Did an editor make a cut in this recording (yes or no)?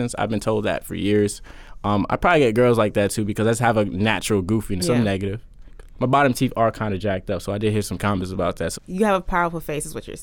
yes